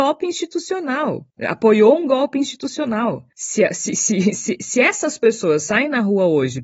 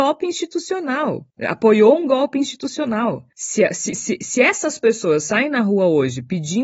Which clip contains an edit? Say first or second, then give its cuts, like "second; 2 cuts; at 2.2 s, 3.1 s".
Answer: second; 1 cut; at 3.9 s